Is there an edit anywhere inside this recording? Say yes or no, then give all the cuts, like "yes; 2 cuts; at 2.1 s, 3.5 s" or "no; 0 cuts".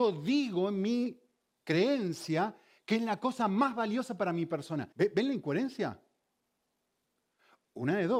yes; 1 cut; at 4.9 s